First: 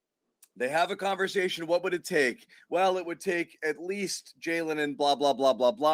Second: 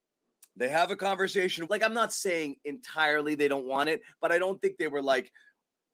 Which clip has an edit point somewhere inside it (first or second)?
second